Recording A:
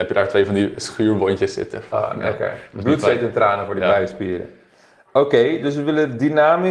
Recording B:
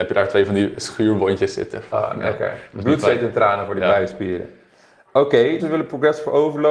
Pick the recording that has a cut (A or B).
B